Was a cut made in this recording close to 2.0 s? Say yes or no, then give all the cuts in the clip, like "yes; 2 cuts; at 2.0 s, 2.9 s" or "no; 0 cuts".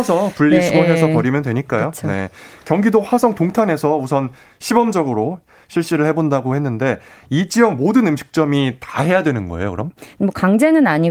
no; 0 cuts